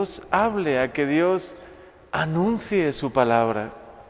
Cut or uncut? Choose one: uncut